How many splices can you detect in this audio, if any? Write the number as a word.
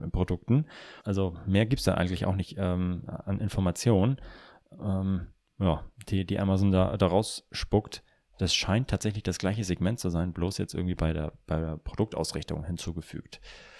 one